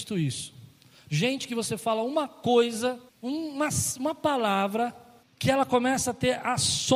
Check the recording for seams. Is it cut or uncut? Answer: cut